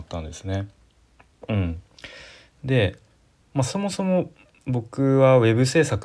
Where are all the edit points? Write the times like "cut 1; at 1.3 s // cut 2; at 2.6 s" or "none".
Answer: none